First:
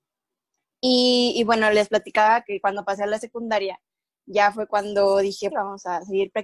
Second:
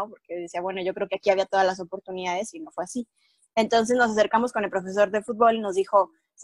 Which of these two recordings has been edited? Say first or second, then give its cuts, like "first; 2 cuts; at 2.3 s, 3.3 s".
first; 1 cut; at 5.5 s